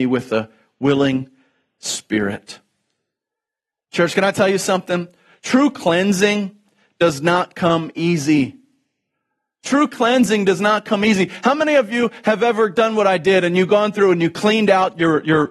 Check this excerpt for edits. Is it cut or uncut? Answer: uncut